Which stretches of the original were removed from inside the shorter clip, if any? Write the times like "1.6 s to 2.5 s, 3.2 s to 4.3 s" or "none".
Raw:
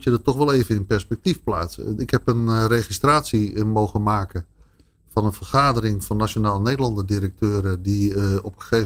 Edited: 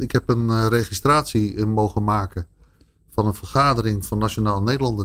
none